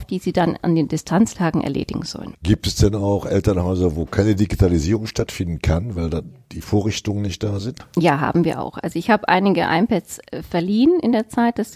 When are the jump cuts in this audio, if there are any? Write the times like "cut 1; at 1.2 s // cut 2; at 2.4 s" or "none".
none